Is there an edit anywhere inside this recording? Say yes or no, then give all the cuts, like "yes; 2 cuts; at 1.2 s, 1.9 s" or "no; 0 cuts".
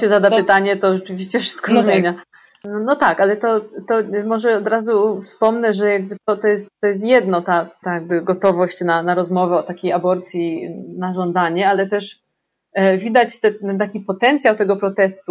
yes; 1 cut; at 7.8 s